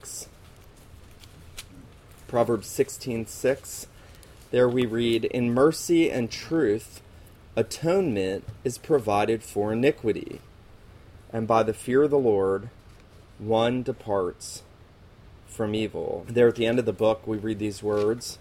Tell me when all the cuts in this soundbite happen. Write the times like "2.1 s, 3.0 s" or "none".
16.2 s